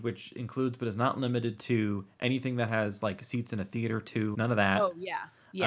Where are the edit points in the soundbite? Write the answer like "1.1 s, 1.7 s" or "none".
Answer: 4.3 s